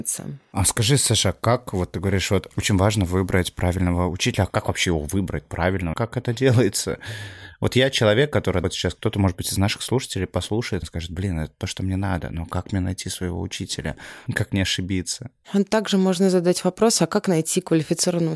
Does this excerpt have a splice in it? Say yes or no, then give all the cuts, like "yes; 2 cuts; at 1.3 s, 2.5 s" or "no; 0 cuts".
yes; 1 cut; at 14.3 s